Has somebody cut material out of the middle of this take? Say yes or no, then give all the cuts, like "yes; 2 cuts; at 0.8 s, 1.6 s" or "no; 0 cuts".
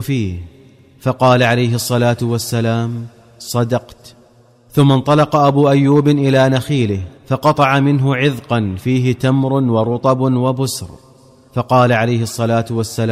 yes; 1 cut; at 7.2 s